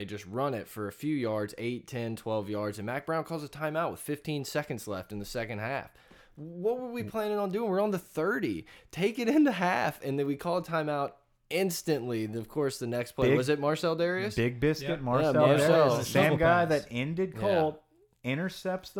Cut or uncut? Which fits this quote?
uncut